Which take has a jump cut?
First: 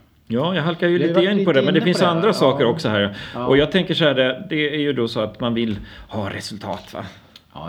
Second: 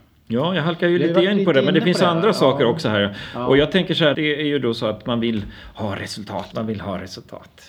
second; 2 cuts; at 4.1 s, 6.5 s

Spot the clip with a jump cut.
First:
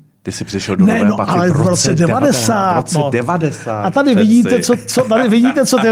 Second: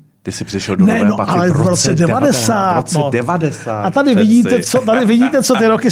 second; 1 cut; at 4.6 s

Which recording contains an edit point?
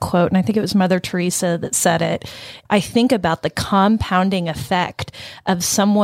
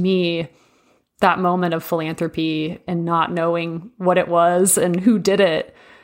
first; 1 cut; at 2.6 s

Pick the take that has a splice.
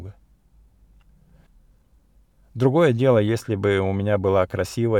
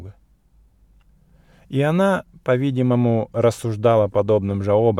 first; 1 cut; at 1.5 s

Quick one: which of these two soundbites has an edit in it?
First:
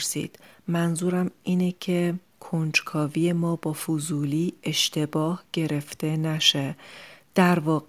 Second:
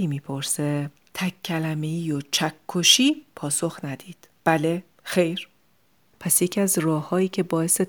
second; 1 cut; at 6.1 s

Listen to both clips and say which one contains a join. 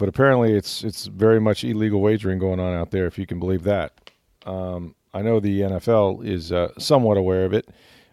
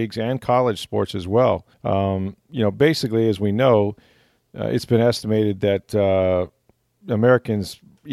second; 1 cut; at 1.7 s

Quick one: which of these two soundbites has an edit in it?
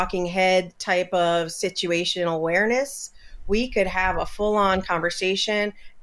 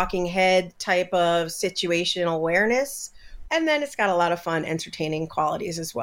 second; 1 cut; at 3.4 s

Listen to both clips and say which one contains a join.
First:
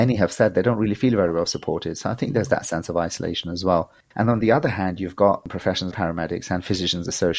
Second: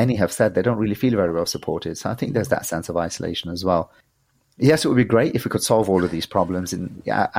first; 2 cuts; at 4.1 s, 5.9 s

